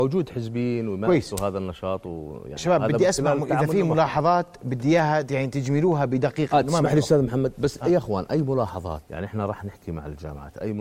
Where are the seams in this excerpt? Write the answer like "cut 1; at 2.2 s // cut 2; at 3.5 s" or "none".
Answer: cut 1; at 9.0 s

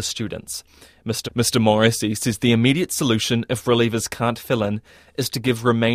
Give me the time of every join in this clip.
cut 1; at 1.2 s

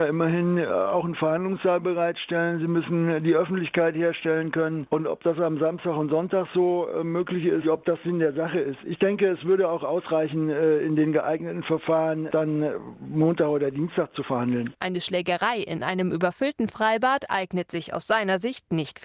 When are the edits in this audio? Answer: cut 1; at 7.6 s

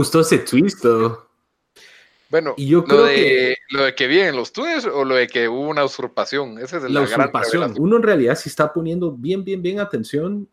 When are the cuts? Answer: cut 1; at 7.7 s

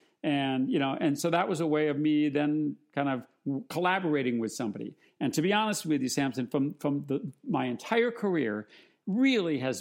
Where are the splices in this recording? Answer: none

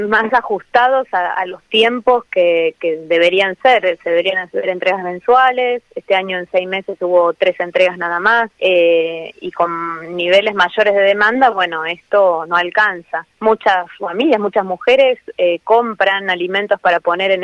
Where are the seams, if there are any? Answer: cut 1; at 8.5 s // cut 2; at 13.3 s

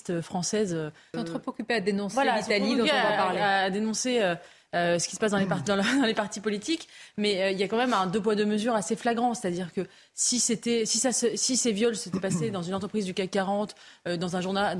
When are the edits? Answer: cut 1; at 1.1 s

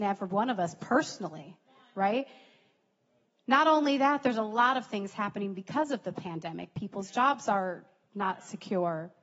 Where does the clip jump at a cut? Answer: none

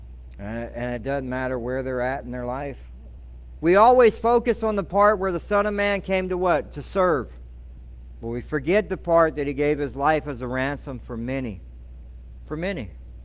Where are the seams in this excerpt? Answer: cut 1; at 3.6 s

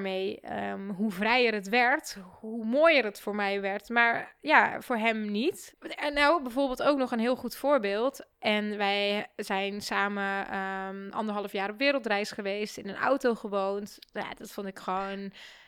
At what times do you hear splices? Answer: cut 1; at 5.7 s // cut 2; at 8.3 s

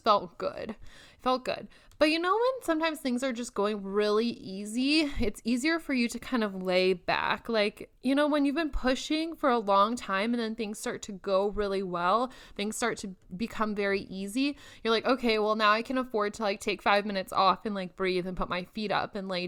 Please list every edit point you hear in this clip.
cut 1; at 8.0 s

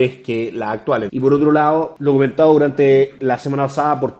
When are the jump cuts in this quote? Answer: cut 1; at 1.1 s

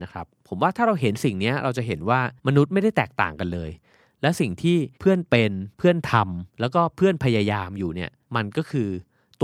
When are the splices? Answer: cut 1; at 2.4 s // cut 2; at 6.5 s

